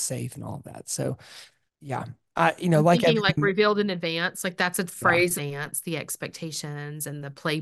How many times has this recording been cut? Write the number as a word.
two